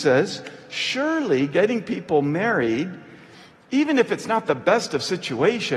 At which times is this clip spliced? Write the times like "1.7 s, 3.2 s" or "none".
none